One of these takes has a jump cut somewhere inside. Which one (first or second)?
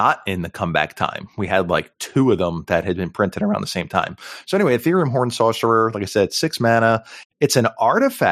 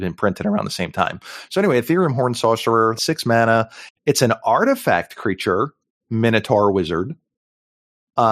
second